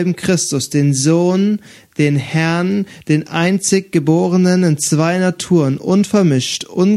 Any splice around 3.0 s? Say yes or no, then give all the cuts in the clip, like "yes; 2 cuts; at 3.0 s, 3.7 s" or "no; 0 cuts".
no; 0 cuts